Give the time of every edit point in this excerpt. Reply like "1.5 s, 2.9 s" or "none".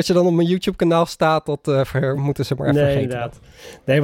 none